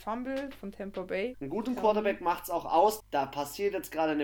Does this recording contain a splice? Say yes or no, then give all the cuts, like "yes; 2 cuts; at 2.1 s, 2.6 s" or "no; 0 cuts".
yes; 2 cuts; at 1.3 s, 3.0 s